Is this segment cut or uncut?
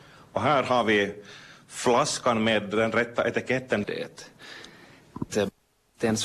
cut